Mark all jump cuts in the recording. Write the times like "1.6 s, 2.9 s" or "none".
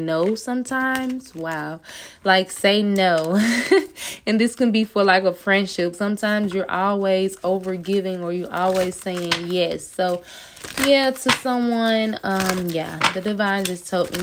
5.9 s